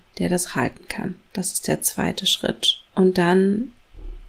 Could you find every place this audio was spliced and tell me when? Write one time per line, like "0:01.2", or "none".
none